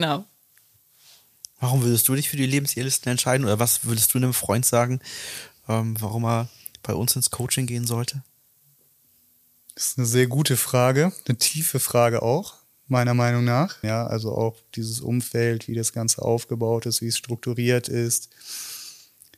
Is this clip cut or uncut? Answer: cut